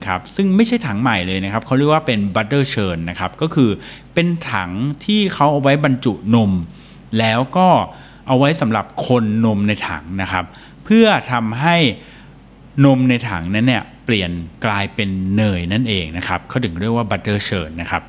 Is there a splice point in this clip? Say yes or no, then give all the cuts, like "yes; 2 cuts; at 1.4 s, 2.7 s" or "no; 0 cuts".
yes; 1 cut; at 14.6 s